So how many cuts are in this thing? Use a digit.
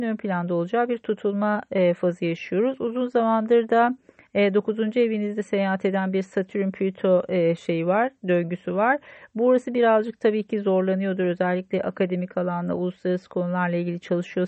0